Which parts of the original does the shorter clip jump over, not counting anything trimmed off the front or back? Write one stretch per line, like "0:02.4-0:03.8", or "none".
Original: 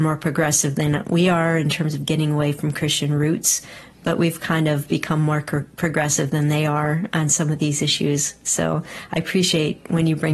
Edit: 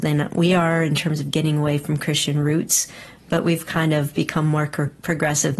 none